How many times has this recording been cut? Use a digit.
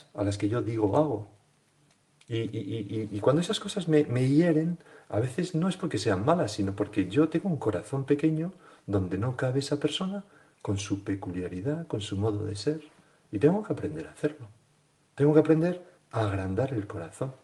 0